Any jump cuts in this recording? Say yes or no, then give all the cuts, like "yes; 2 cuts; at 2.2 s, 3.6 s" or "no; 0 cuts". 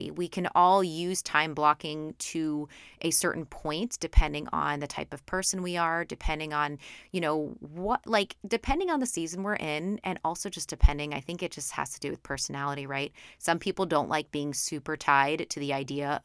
no; 0 cuts